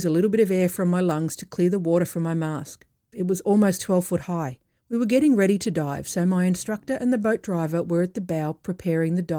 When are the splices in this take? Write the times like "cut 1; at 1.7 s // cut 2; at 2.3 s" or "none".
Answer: cut 1; at 3.1 s // cut 2; at 4.8 s